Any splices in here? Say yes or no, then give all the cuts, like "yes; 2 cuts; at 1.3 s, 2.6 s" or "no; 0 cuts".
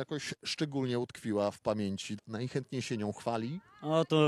yes; 1 cut; at 2.2 s